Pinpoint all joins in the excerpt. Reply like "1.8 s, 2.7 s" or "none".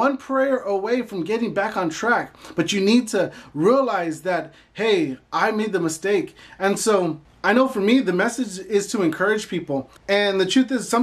10.0 s

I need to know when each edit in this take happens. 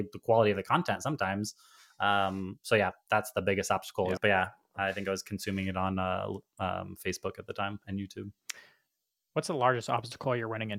4.2 s

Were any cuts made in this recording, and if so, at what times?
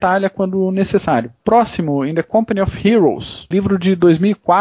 1.4 s, 3.5 s

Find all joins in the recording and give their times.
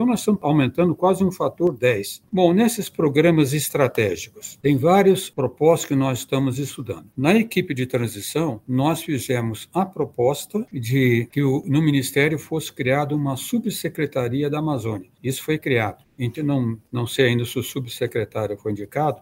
2.2 s, 7.1 s, 16.4 s

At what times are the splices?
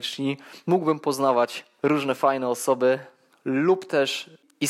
3.3 s

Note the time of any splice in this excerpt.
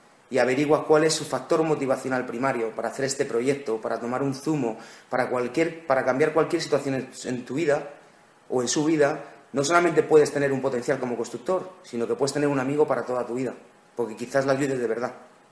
none

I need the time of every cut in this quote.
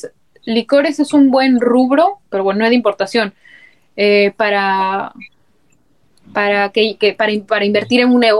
none

